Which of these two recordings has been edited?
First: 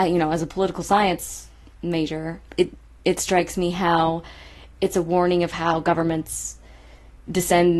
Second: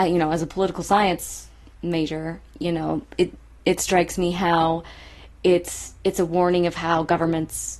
first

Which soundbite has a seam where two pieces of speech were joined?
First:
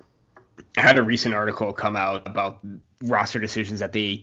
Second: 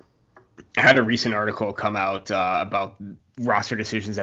first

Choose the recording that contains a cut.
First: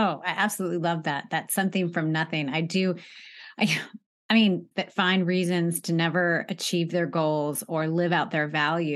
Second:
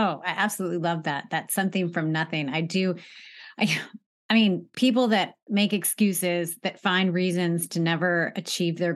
first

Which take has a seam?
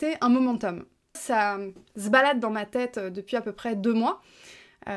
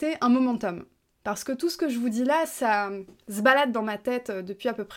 first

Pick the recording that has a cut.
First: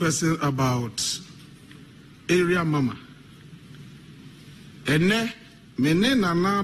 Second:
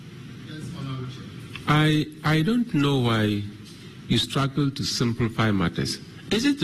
first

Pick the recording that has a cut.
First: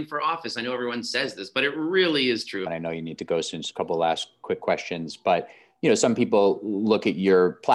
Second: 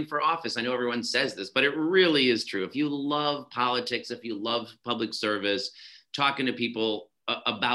first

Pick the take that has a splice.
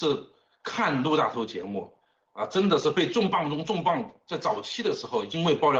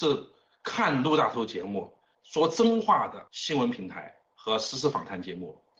second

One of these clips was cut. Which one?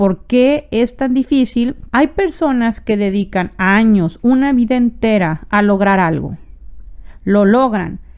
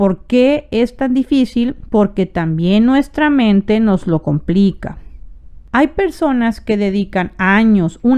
first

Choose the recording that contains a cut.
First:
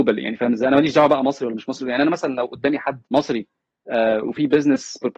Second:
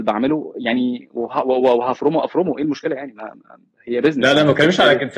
first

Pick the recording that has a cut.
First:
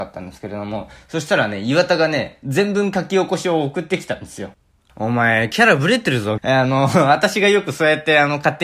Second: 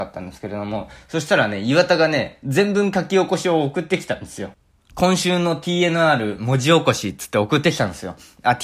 first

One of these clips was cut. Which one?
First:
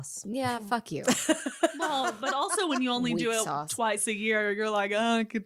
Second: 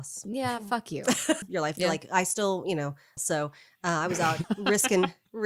second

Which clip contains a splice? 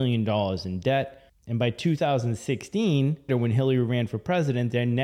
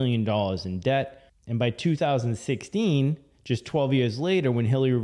first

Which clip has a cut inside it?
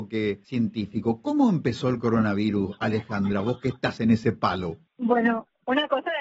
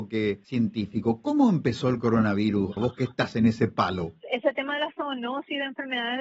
second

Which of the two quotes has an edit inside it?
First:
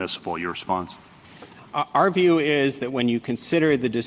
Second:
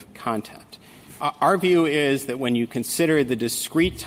second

